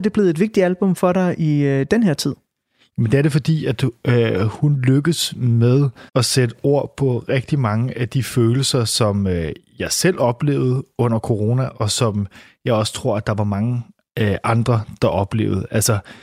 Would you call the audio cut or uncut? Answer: cut